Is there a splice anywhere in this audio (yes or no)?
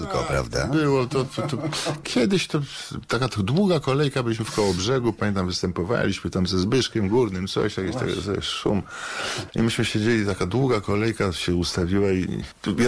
no